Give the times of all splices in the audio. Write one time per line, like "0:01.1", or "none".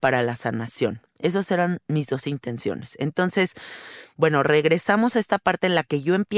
none